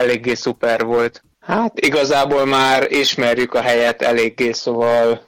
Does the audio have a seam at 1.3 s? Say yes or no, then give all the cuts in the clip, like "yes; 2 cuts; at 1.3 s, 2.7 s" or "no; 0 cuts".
yes; 1 cut; at 1.3 s